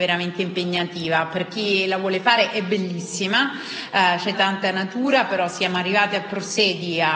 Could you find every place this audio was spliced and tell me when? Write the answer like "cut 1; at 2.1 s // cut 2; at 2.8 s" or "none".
cut 1; at 4.3 s